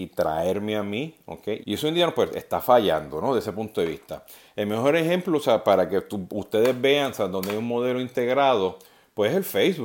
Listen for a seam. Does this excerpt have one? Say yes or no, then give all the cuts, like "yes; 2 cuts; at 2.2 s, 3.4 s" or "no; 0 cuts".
yes; 1 cut; at 1.6 s